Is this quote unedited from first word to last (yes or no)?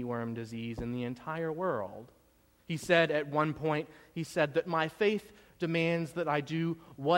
no